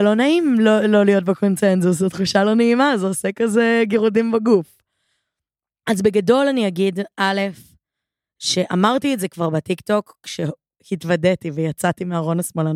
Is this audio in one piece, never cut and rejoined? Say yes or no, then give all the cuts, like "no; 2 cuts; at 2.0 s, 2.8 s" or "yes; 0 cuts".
yes; 0 cuts